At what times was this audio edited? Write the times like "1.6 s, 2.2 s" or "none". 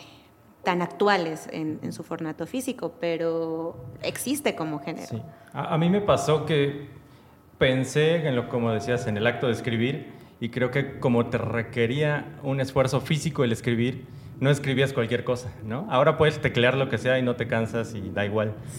none